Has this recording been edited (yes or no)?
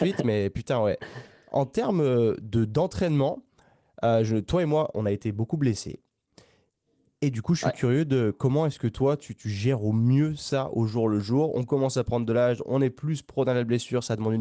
no